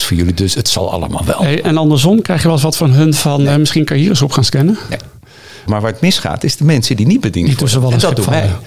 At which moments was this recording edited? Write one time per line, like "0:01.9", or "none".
0:01.6
0:05.7